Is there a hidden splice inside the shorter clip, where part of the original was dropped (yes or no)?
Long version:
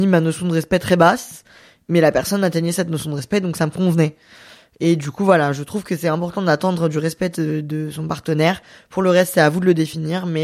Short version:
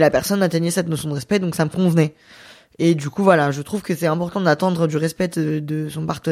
no